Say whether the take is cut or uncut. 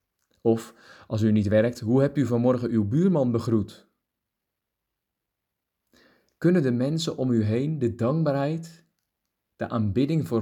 uncut